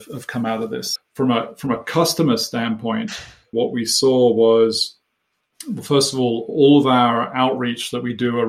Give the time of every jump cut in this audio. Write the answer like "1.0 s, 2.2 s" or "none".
1.0 s, 3.5 s